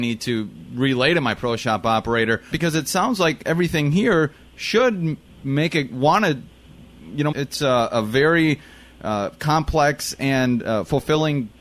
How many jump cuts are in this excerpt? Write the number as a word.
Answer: two